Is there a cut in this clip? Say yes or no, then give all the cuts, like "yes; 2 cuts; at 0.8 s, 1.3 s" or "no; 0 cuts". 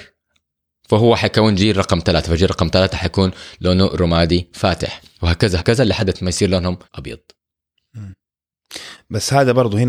yes; 2 cuts; at 5.6 s, 6.8 s